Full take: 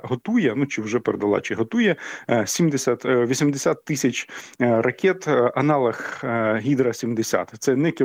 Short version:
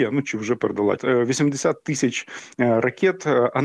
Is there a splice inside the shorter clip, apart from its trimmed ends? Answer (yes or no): yes